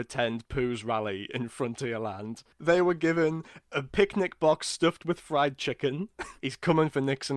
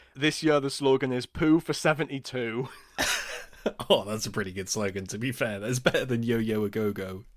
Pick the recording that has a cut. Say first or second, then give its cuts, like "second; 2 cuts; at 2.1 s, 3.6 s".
first; 2 cuts; at 2.5 s, 6.4 s